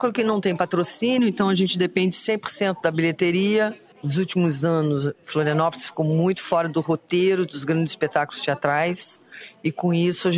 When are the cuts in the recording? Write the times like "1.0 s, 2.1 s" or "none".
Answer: none